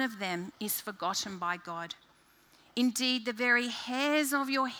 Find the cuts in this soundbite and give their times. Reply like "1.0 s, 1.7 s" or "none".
none